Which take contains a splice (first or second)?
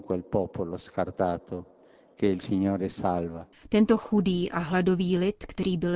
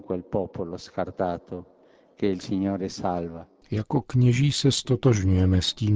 first